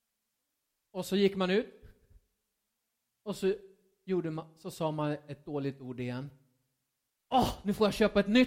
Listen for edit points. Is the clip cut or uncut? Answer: uncut